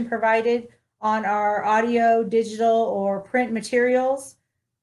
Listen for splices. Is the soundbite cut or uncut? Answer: uncut